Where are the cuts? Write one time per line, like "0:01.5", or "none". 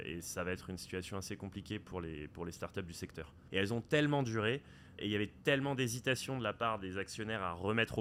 0:03.5
0:05.0